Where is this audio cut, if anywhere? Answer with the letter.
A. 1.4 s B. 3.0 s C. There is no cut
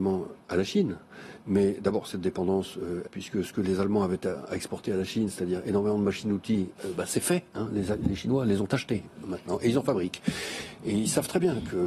B